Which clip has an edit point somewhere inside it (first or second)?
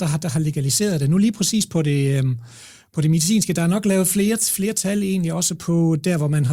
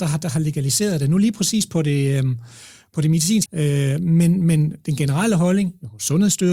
second